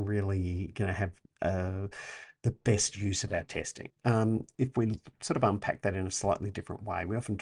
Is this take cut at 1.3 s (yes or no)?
no